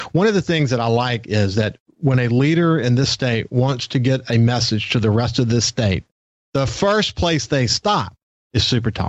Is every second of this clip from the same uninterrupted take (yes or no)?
yes